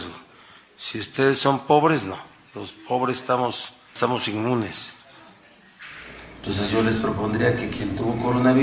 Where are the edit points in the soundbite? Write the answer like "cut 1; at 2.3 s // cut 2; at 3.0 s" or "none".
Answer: cut 1; at 4.0 s

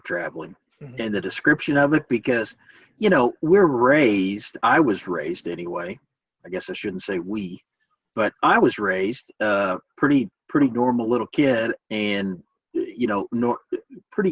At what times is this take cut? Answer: none

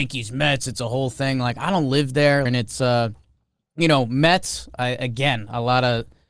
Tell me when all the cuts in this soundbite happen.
cut 1; at 2.5 s

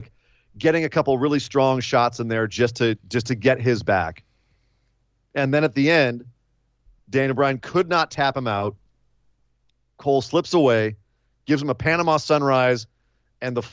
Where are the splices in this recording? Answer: none

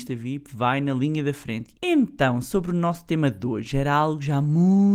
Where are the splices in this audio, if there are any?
cut 1; at 1.8 s

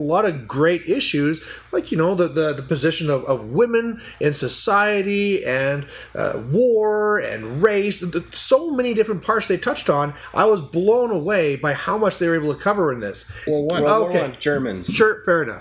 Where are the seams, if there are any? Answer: cut 1; at 13.5 s

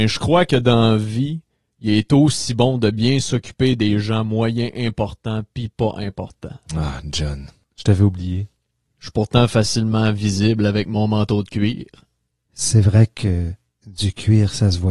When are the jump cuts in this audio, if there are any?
none

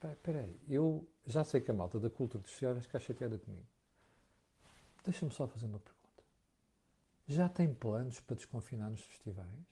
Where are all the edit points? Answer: none

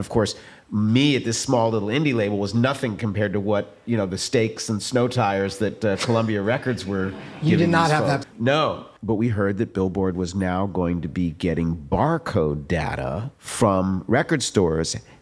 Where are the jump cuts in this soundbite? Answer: cut 1; at 8.2 s // cut 2; at 13.3 s

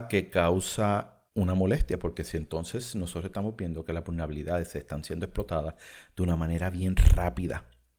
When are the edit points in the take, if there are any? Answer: cut 1; at 1.3 s

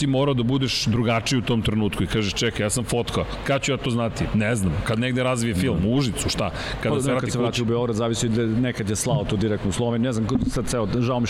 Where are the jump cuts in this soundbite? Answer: none

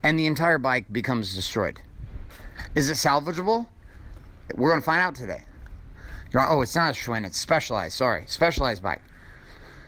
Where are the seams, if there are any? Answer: none

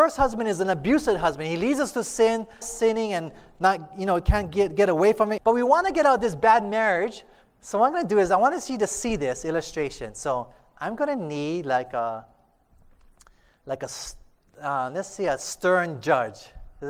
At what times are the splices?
cut 1; at 2.6 s // cut 2; at 5.4 s // cut 3; at 7.4 s

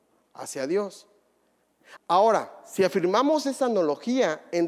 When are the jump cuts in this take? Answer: cut 1; at 2.0 s

